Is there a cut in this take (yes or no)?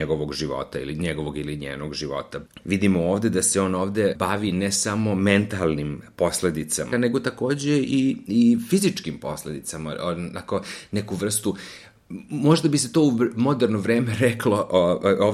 yes